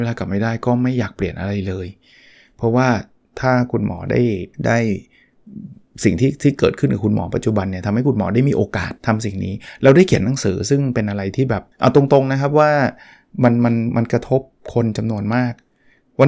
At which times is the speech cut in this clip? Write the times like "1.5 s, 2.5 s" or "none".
4.5 s, 9.0 s, 11.7 s